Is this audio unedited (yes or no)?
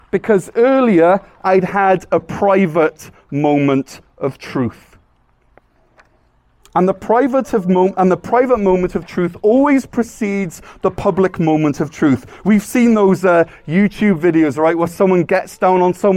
yes